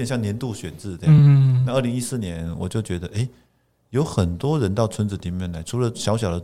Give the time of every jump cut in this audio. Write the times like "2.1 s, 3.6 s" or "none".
none